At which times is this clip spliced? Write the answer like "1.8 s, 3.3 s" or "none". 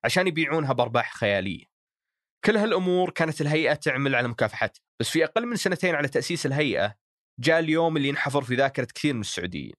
4.9 s